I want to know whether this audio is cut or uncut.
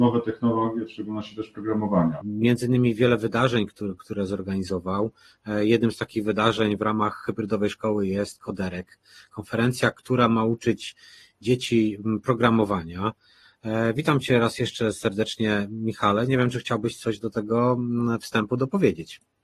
cut